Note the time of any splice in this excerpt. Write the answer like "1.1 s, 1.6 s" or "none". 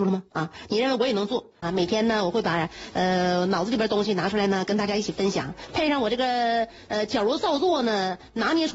1.6 s